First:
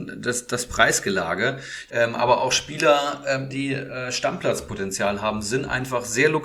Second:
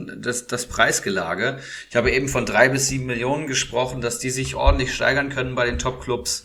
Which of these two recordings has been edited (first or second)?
first